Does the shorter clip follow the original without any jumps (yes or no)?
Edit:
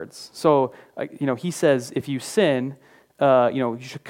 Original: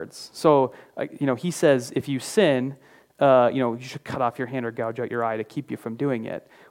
yes